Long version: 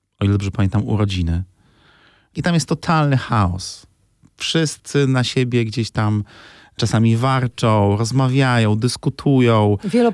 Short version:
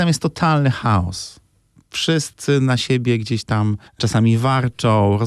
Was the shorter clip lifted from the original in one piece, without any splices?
no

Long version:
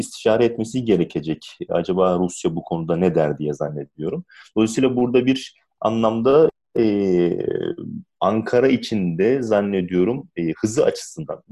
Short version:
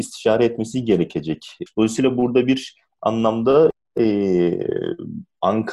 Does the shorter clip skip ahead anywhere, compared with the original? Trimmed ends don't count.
yes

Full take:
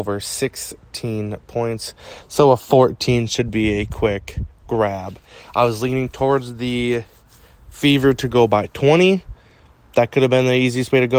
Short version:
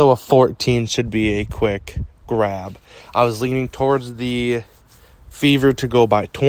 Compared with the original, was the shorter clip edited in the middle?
no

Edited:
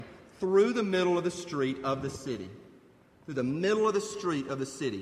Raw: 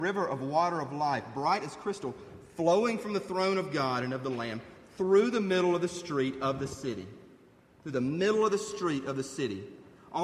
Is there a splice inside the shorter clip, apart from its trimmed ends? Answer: no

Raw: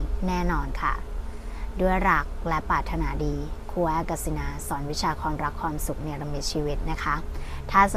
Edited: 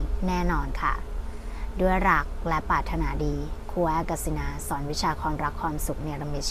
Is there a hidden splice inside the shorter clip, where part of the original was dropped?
no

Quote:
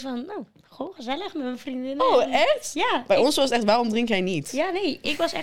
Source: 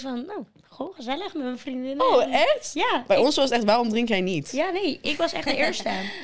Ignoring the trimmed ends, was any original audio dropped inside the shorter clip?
no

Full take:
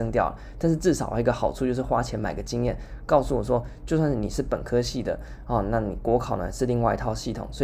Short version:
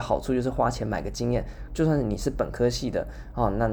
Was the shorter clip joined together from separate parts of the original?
yes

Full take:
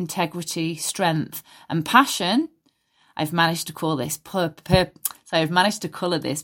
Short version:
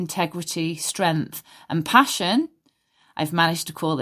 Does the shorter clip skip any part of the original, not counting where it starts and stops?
no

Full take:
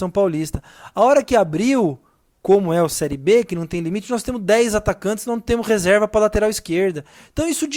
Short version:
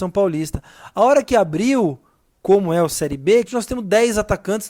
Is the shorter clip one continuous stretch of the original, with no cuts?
no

